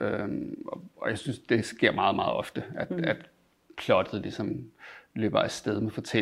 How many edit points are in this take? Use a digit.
0